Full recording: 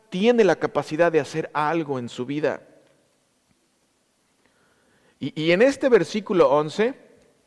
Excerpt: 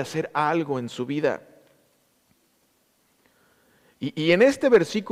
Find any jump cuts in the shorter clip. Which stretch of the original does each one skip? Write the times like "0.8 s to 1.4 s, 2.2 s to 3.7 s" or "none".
none